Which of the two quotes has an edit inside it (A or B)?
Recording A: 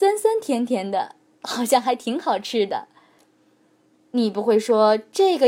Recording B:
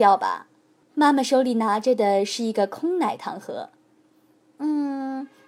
A